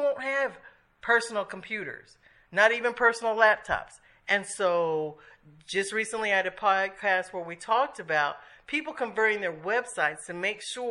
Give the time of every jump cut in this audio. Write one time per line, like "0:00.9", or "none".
0:04.2